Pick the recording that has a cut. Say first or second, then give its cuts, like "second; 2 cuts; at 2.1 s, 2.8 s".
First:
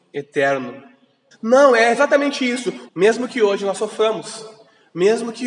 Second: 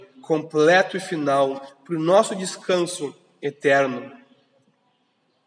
first; 2 cuts; at 1.3 s, 2.9 s